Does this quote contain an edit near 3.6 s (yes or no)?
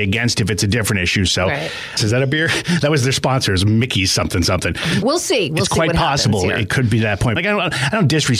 no